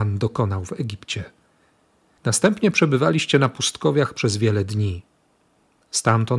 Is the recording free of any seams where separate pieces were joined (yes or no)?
yes